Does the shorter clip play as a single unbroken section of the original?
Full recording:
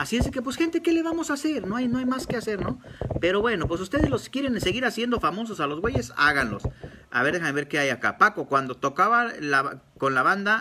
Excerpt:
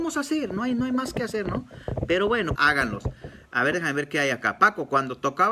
no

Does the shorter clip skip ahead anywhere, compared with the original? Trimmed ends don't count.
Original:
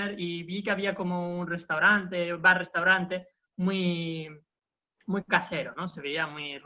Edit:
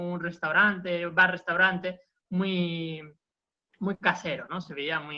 no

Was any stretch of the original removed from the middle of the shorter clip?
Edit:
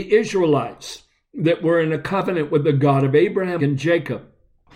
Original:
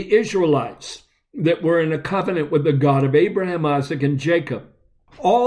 yes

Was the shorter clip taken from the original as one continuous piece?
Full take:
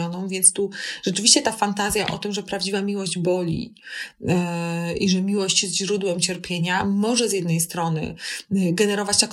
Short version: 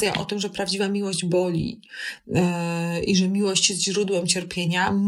yes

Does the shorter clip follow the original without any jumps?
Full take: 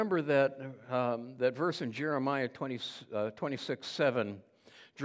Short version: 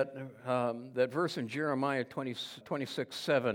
no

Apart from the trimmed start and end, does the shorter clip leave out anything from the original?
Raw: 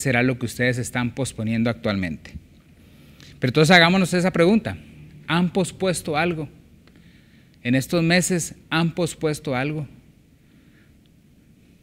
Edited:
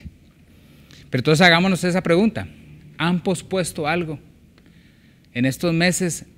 no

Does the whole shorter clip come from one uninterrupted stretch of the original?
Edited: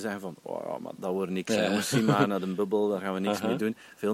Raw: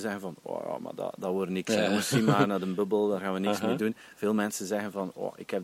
no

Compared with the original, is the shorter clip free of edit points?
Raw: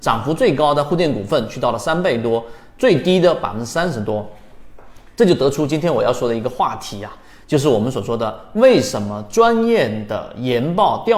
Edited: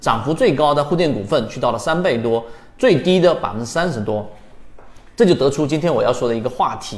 yes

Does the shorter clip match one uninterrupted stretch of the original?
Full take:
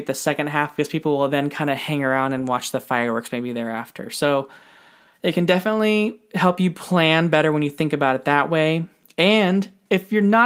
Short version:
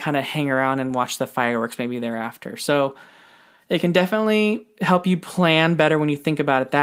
yes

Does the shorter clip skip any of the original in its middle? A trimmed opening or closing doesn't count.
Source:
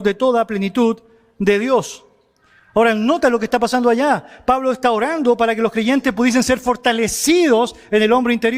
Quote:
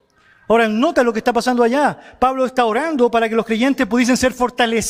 no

